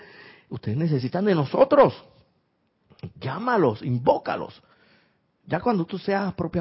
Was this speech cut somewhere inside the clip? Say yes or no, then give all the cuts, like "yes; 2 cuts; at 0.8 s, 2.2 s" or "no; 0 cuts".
no; 0 cuts